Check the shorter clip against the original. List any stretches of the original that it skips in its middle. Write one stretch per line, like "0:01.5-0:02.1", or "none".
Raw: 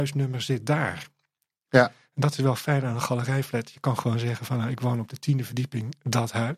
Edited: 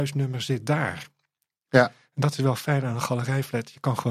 none